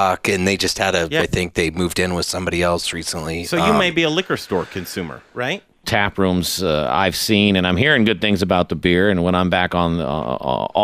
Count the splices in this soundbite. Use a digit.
2